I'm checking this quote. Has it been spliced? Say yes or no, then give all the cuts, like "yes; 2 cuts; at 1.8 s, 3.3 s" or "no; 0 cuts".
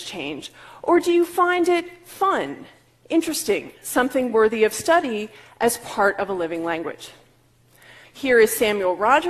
yes; 1 cut; at 8.0 s